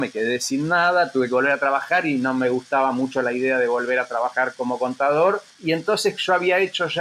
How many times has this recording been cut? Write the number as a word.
one